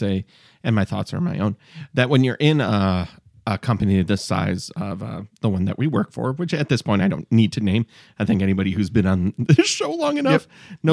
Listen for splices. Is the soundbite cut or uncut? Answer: uncut